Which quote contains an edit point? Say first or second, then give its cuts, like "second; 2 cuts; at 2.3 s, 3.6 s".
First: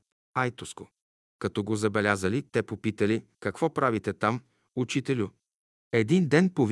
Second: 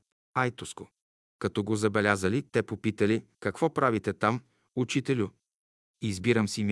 first; 1 cut; at 5.7 s